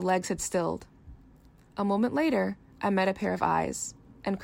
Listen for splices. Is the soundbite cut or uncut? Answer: uncut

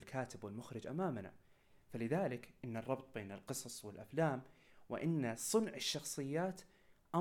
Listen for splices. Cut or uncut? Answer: uncut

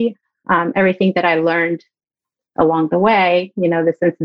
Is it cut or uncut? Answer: uncut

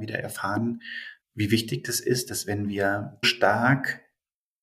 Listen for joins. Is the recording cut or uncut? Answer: cut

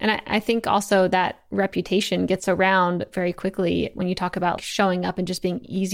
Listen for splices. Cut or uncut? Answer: cut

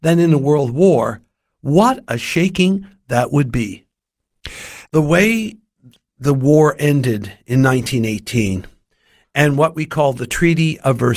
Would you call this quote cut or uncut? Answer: cut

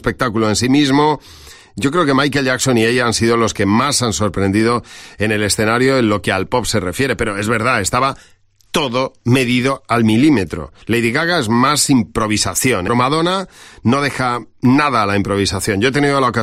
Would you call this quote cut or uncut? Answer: cut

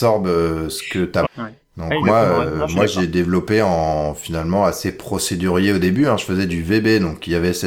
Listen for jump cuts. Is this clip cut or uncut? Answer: cut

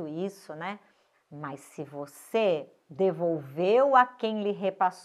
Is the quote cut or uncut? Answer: cut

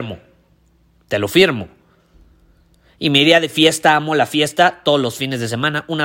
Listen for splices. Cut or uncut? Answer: uncut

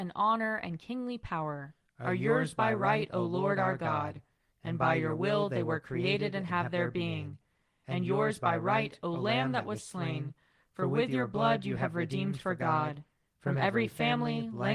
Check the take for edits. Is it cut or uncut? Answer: cut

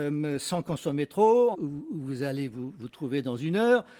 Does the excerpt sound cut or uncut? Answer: cut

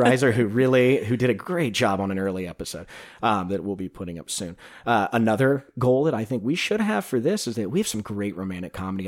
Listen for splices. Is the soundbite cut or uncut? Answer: uncut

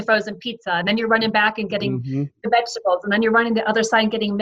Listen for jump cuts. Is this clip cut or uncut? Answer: uncut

